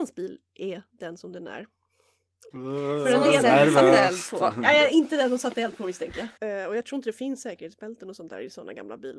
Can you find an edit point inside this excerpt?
yes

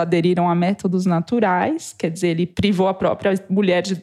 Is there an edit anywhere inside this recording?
no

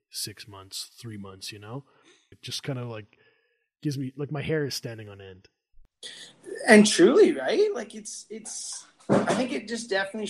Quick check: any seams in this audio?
yes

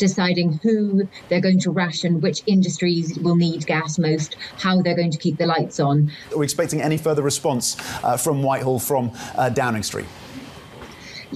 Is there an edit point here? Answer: yes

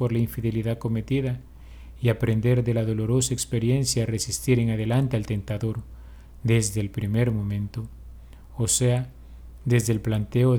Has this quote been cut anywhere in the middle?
no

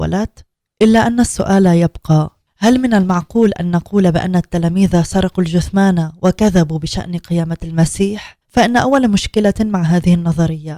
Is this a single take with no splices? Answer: no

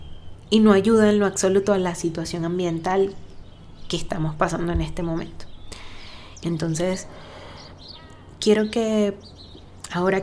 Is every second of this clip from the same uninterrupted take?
no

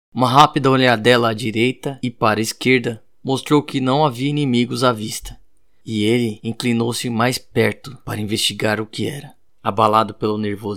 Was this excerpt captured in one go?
no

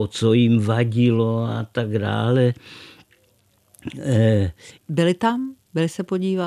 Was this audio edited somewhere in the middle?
yes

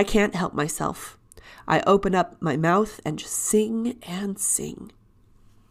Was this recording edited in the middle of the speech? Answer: no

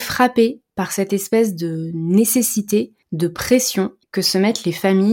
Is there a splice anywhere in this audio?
yes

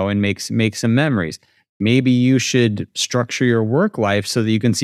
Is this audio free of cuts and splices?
yes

